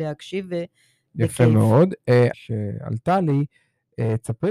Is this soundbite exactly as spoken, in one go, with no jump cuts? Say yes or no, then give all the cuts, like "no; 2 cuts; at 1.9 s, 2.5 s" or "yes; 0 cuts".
no; 2 cuts; at 1.1 s, 2.3 s